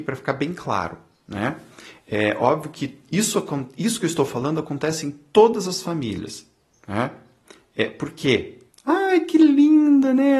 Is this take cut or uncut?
cut